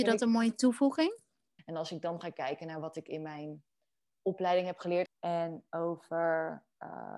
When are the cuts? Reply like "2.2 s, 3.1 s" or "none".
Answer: 1.6 s, 5.1 s